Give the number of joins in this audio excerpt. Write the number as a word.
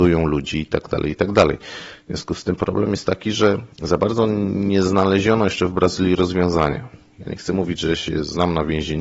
one